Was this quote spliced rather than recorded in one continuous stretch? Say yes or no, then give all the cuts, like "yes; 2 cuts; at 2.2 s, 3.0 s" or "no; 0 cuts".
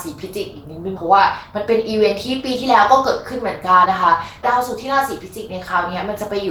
yes; 1 cut; at 3.9 s